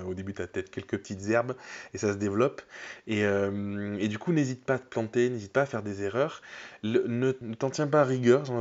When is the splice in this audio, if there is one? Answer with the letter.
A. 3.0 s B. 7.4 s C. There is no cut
B